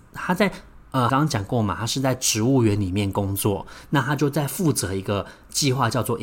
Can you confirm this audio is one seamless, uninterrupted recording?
no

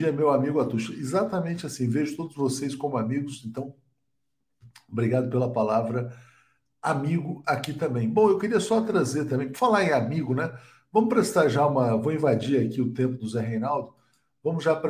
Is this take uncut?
yes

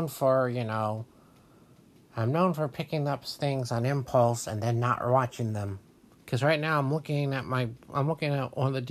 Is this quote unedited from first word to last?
no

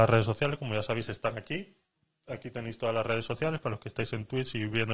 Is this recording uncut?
yes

